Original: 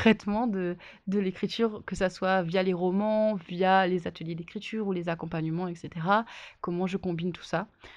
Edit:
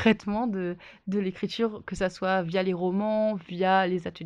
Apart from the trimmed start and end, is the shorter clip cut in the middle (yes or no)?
no